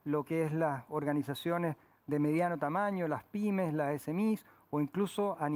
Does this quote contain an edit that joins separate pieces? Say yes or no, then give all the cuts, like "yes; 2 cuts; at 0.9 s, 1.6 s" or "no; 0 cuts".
no; 0 cuts